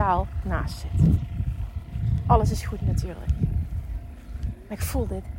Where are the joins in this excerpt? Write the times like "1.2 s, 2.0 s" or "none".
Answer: none